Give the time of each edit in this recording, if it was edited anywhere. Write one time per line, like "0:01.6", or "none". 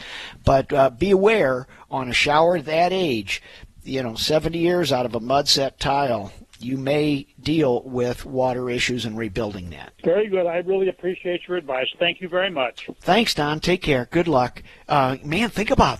0:06.5
0:09.9